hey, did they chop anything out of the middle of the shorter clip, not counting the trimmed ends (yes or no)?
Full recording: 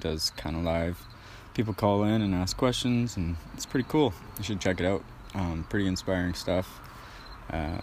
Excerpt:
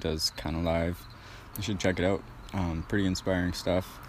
yes